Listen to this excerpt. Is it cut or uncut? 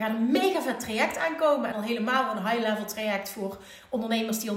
uncut